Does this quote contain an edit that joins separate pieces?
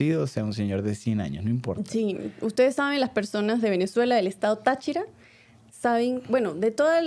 no; 0 cuts

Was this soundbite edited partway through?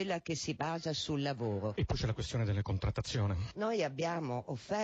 no; 0 cuts

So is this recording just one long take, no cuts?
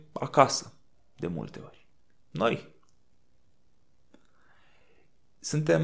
no; 1 cut; at 2.2 s

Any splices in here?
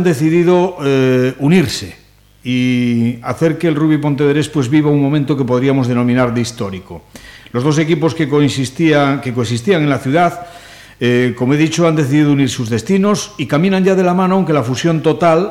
no; 0 cuts

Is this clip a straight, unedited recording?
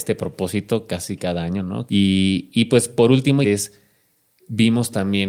no; 2 cuts; at 1.9 s, 3.4 s

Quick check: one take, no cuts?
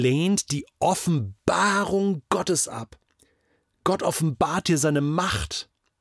yes; 0 cuts

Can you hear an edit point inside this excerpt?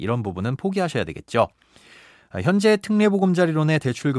no; 0 cuts

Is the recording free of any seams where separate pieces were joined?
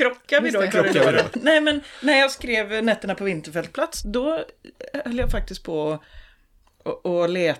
no; 2 cuts; at 1.3 s, 4.0 s

